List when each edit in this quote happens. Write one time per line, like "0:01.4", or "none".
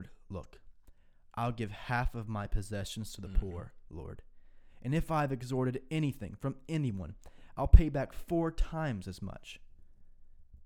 none